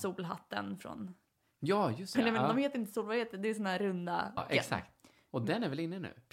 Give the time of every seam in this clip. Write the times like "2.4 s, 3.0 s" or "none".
2.1 s, 4.4 s

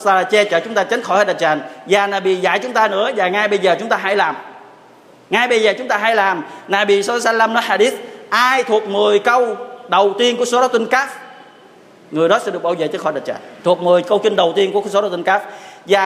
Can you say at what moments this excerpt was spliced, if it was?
13.6 s

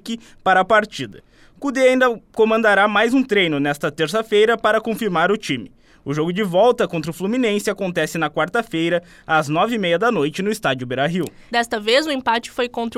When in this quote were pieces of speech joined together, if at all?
11.5 s

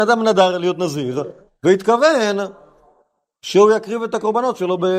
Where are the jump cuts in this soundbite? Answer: none

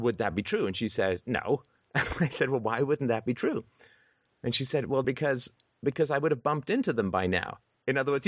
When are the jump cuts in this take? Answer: 5.0 s

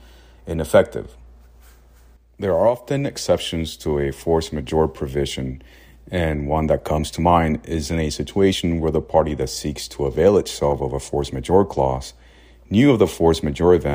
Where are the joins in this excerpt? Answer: none

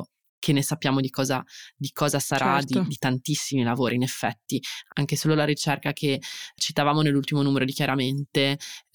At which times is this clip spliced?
6.6 s

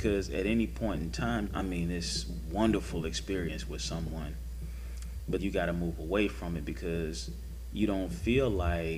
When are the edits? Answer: 1.5 s, 5.4 s

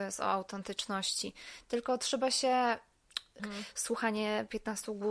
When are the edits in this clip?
3.4 s

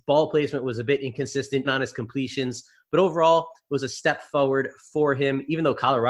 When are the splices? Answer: 1.6 s

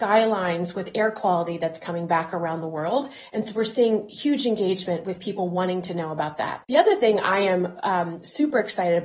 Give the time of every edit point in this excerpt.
6.6 s

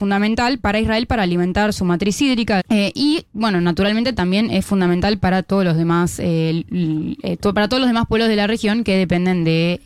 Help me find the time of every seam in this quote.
2.6 s

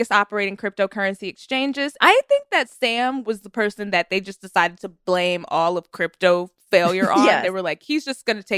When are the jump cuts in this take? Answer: 2.0 s

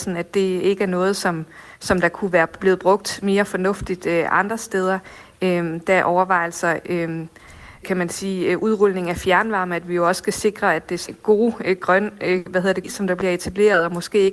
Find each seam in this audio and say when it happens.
7.8 s, 11.1 s, 12.8 s

